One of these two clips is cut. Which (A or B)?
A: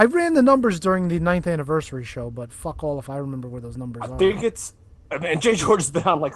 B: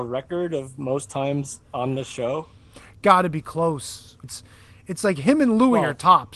B